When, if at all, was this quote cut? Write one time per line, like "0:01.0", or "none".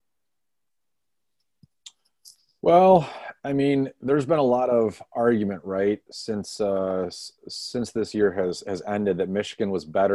none